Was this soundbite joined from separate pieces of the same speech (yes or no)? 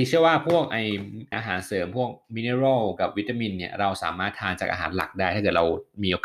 yes